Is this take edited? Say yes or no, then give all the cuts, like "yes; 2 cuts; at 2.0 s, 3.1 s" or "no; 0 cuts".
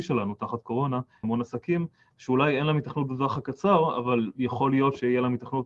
yes; 1 cut; at 1.2 s